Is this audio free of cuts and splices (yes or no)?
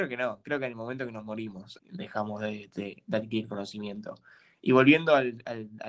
no